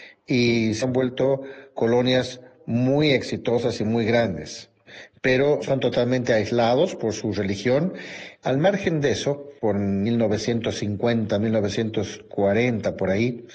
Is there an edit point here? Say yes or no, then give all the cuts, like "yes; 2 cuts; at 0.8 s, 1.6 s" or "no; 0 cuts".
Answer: yes; 2 cuts; at 8.4 s, 9.6 s